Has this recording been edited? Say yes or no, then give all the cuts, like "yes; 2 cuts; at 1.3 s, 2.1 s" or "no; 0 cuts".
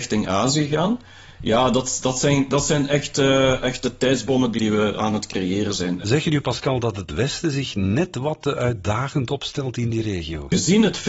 no; 0 cuts